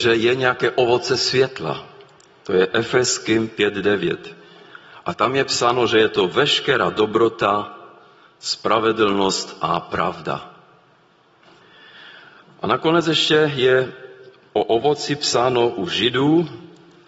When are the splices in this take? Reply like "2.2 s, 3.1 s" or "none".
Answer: none